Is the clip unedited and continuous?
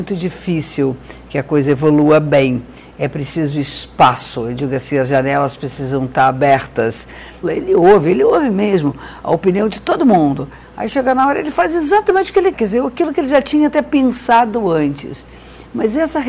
no; 2 cuts; at 7.4 s, 12.5 s

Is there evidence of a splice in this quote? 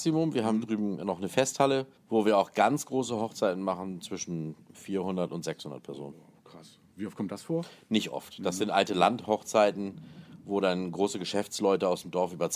yes; 1 cut; at 2.0 s

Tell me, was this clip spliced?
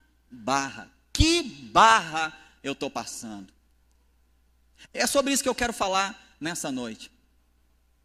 yes; 1 cut; at 4.9 s

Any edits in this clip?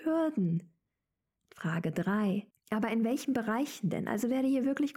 yes; 1 cut; at 2.5 s

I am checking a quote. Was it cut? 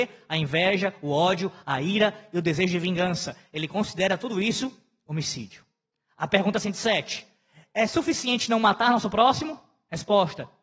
no; 0 cuts

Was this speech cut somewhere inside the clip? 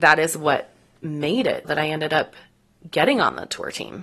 yes; 1 cut; at 1.6 s

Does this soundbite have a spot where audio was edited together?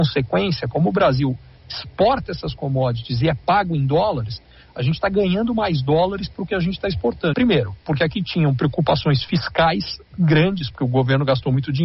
yes; 1 cut; at 7.3 s

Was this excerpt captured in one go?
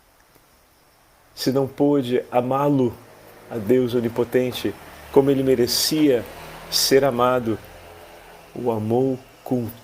yes; 0 cuts

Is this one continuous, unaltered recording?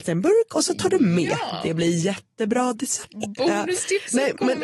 yes; 0 cuts

